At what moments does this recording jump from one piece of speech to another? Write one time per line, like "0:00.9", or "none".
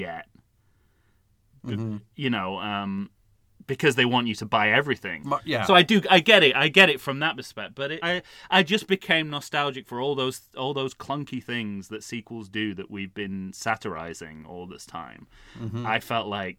0:05.2
0:08.0